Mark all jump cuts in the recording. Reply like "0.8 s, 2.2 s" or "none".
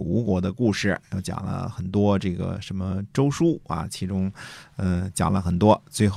none